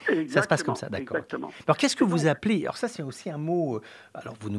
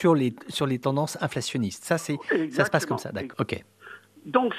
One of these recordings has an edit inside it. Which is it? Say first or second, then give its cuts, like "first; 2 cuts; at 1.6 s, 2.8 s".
second; 1 cut; at 3.3 s